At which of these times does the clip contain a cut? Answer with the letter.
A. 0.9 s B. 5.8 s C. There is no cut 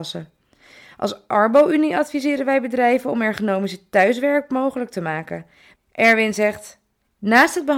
B